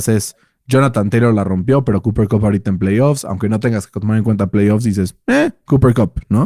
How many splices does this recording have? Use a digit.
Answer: 0